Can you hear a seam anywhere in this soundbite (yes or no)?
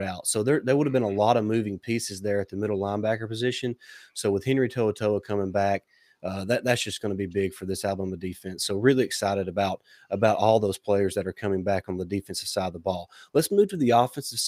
no